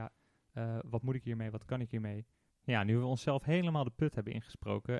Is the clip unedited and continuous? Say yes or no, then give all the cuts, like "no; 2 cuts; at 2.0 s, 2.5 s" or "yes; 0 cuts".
no; 1 cut; at 2.5 s